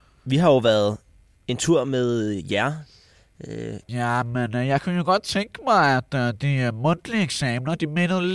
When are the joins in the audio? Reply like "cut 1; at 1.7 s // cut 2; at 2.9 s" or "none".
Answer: cut 1; at 3.8 s